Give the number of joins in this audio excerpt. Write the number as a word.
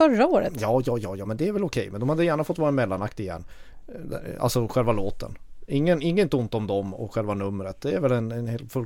zero